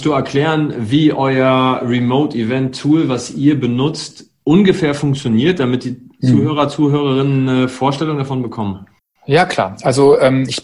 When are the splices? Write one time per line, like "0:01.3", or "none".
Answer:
none